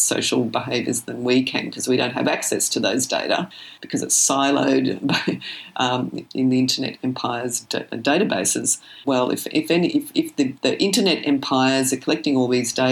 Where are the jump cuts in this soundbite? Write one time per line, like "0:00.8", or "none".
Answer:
0:09.0